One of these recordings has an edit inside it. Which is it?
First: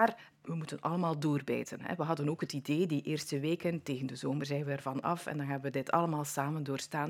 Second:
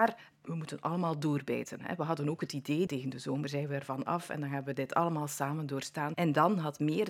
second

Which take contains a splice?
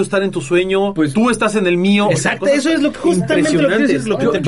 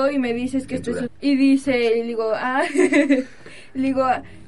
second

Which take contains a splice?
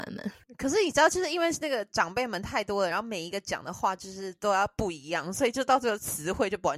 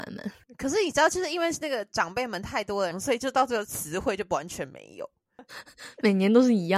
second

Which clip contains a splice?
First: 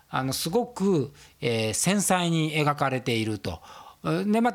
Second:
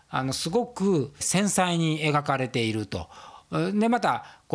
second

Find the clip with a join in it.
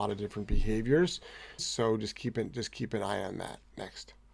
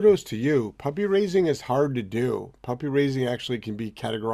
first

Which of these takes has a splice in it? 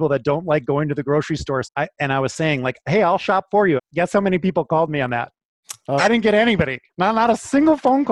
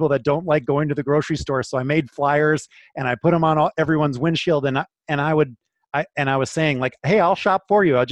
first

